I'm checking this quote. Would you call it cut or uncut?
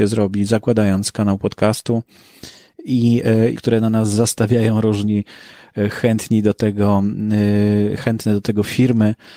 cut